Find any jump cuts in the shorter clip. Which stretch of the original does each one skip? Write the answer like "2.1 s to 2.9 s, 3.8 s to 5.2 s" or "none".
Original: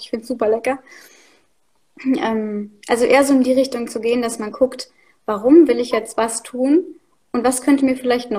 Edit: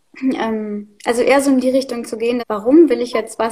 4.2 s to 5.2 s